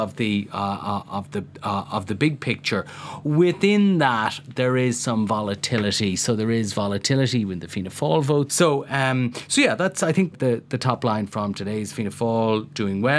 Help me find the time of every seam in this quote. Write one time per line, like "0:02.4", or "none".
0:08.5
0:10.3